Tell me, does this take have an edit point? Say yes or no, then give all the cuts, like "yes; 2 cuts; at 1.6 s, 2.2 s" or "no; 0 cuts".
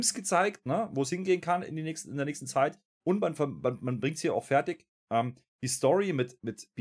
no; 0 cuts